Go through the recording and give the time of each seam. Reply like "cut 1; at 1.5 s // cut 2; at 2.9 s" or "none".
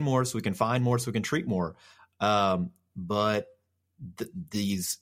none